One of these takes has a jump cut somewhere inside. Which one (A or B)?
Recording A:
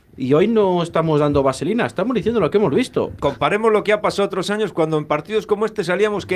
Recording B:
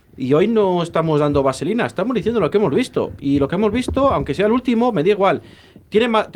A